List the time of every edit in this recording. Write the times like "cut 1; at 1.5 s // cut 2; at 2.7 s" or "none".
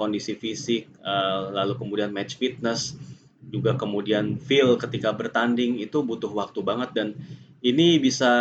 none